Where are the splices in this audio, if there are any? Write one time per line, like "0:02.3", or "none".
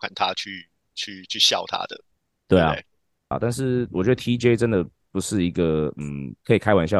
0:03.3